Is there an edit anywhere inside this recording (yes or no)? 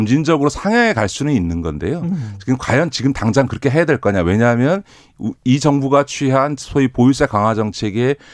no